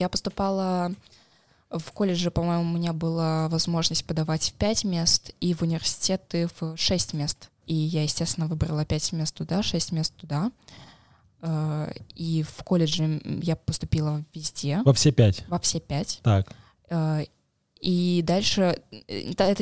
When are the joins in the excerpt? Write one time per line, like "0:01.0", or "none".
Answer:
none